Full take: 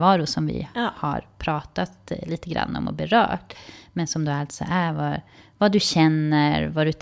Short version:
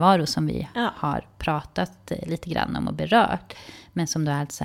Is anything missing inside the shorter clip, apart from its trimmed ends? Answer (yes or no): no